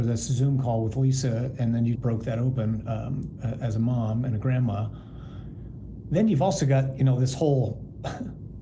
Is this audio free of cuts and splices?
no; 1 cut; at 2.0 s

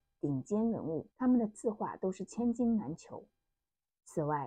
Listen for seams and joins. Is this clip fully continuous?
no; 1 cut; at 1.1 s

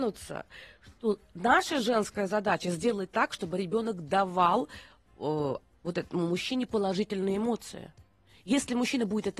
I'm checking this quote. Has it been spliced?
no; 0 cuts

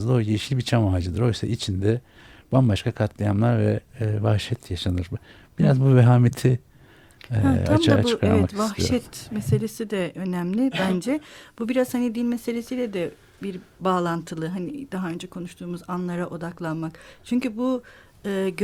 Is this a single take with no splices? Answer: yes; 0 cuts

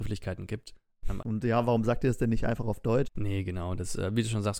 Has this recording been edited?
yes; 2 cuts; at 1.2 s, 3.0 s

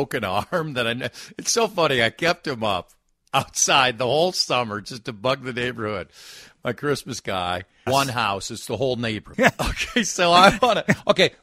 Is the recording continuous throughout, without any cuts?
no; 2 cuts; at 7.9 s, 9.3 s

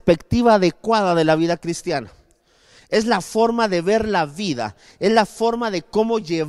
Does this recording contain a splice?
no; 0 cuts

